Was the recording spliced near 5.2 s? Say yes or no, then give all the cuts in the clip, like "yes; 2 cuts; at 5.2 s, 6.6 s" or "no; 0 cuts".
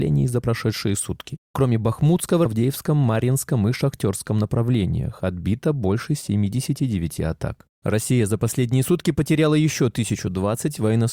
no; 1 cut; at 2.5 s